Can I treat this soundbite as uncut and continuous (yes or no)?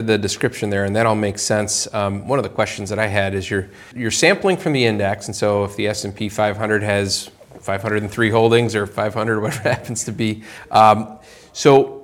no